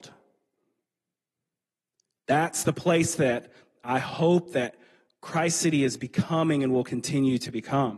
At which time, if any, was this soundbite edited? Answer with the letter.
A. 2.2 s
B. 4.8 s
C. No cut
C